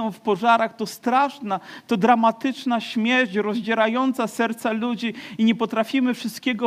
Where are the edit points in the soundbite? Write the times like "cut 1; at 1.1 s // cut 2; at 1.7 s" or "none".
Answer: none